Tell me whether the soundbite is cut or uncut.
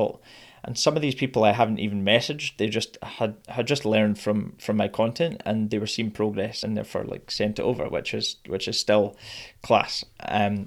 uncut